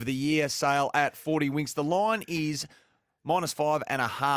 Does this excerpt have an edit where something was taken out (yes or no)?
no